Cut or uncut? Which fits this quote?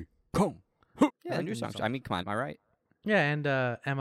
cut